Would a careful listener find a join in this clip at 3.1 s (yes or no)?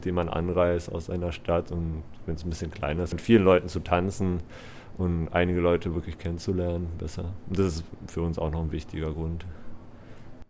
yes